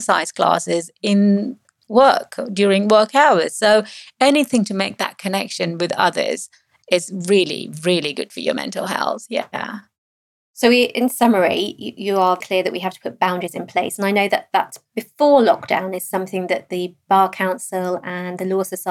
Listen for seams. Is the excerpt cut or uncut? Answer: cut